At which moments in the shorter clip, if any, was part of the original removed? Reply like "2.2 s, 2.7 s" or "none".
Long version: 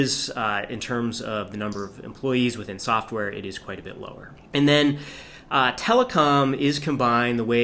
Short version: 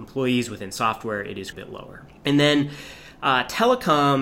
1.5 s